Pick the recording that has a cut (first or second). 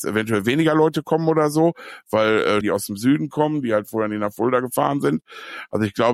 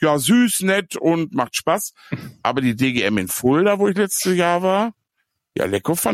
first